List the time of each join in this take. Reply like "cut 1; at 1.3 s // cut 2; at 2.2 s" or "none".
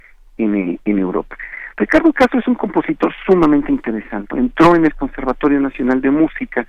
cut 1; at 4.3 s